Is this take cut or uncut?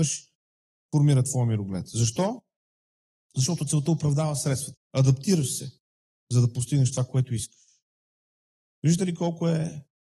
cut